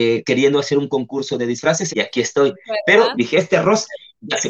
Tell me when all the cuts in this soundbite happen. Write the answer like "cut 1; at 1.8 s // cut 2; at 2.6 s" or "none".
cut 1; at 1.9 s // cut 2; at 3.1 s